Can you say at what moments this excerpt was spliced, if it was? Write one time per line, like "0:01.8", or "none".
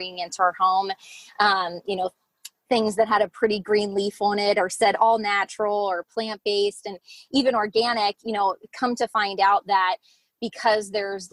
none